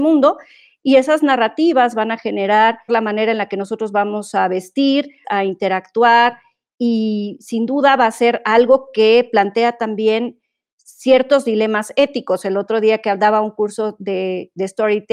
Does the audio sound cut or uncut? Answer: cut